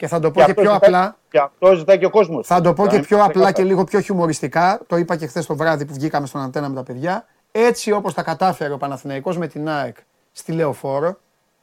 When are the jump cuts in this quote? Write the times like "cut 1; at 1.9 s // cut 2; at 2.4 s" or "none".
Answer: none

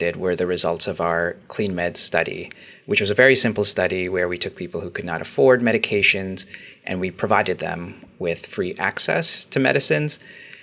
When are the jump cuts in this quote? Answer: none

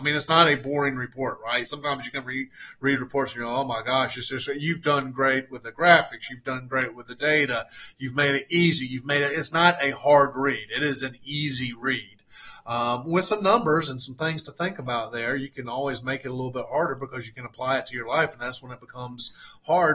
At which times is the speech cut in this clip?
none

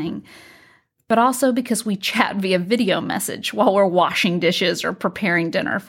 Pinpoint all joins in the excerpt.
none

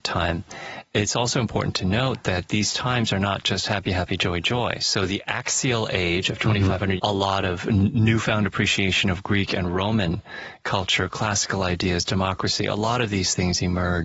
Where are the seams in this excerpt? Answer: cut 1; at 7.0 s

